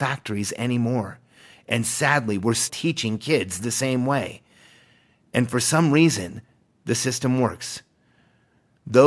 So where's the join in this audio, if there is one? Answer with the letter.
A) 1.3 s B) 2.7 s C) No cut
B